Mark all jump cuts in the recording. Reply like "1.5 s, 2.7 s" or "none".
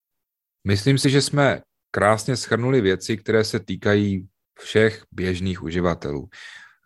none